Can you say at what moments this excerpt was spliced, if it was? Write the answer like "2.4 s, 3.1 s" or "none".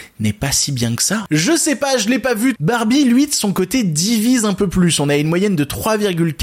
2.6 s